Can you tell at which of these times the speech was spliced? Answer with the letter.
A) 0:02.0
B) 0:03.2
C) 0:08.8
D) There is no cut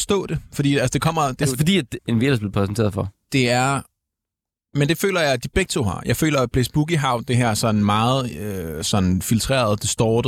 A